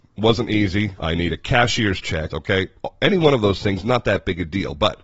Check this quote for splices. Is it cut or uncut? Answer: cut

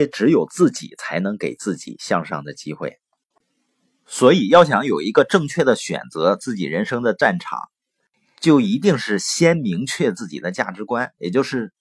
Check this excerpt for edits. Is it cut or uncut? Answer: uncut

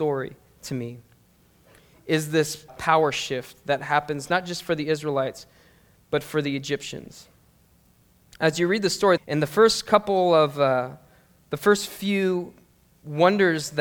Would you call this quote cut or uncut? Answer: cut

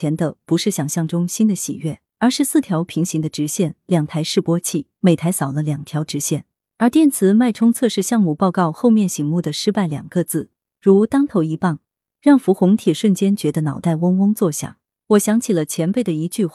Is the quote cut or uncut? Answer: cut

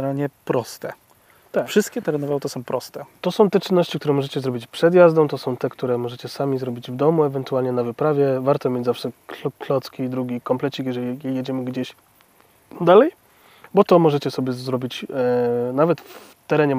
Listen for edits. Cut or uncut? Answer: uncut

